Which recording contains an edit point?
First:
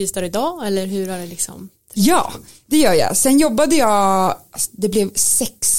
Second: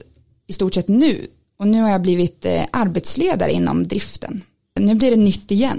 second; 1 cut; at 4.8 s

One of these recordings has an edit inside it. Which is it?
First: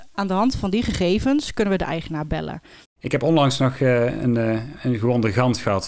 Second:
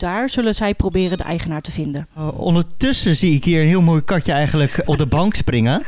second; 2 cuts; at 2.1 s, 4.8 s

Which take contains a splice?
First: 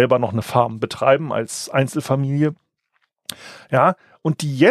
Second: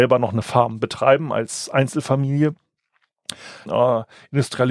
second; 1 cut; at 3.7 s

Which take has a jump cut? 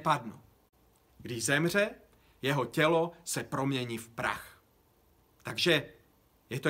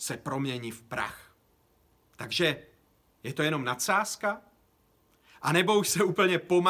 first; 1 cut; at 1.1 s

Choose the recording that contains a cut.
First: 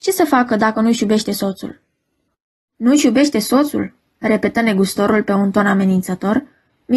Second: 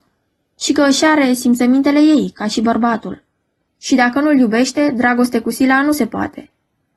second; 1 cut; at 3.7 s

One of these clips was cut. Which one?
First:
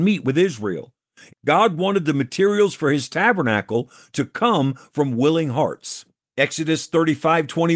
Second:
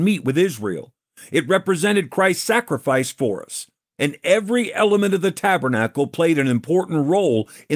first; 1 cut; at 1.3 s

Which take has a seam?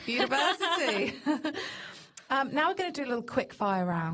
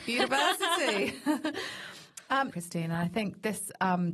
second; 1 cut; at 2.5 s

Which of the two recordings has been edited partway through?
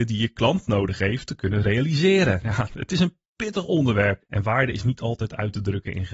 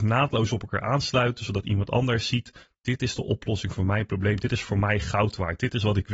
first; 1 cut; at 4.2 s

